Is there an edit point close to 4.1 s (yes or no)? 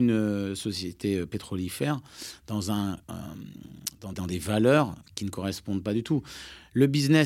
yes